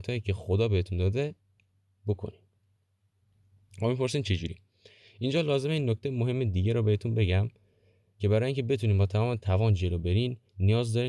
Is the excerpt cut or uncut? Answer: uncut